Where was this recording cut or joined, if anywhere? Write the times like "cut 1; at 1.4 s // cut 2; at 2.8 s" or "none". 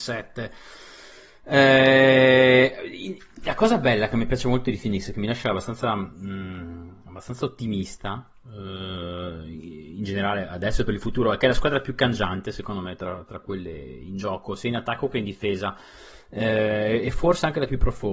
none